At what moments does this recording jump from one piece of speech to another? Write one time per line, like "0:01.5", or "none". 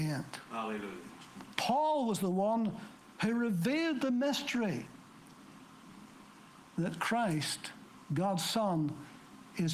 0:01.5